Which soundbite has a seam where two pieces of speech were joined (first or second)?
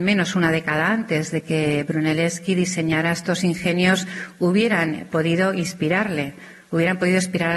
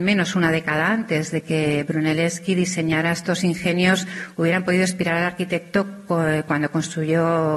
second